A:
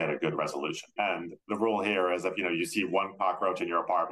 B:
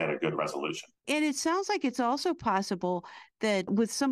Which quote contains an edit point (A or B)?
A